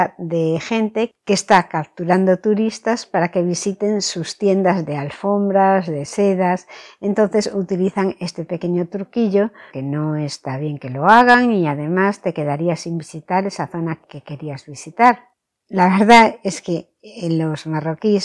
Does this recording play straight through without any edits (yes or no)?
no